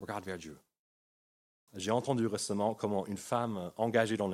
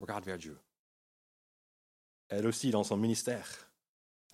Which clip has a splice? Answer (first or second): first